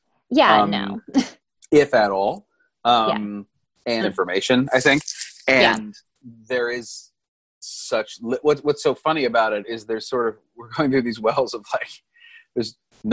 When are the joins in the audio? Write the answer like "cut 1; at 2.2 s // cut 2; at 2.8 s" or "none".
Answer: cut 1; at 4.0 s